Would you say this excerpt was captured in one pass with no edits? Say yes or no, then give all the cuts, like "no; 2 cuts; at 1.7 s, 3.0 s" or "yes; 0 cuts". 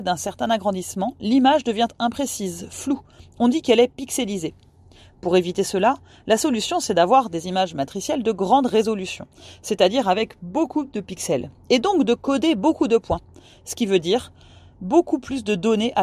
yes; 0 cuts